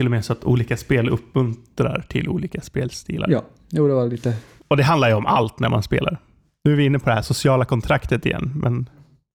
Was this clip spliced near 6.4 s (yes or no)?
no